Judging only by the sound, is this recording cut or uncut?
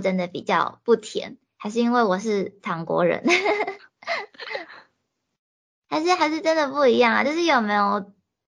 uncut